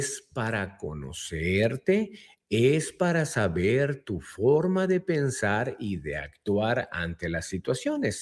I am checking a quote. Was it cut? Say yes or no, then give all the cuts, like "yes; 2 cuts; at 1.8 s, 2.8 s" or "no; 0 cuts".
no; 0 cuts